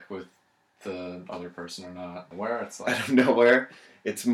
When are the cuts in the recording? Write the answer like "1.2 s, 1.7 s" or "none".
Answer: 2.3 s